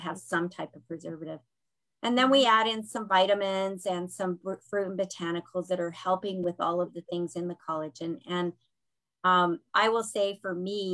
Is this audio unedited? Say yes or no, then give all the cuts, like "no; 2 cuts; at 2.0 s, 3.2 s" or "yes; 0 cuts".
yes; 0 cuts